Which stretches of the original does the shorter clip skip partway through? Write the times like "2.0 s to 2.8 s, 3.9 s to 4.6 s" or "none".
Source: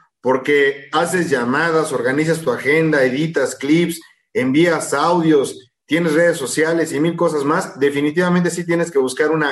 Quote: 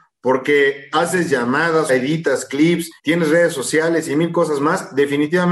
1.9 s to 3.0 s, 4.1 s to 5.8 s